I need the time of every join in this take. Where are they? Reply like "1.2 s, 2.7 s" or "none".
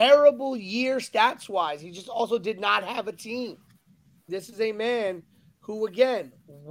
4.3 s